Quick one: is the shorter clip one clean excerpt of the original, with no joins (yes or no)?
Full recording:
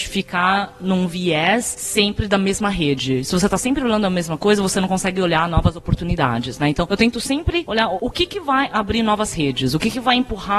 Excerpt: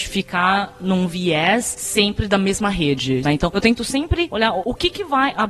no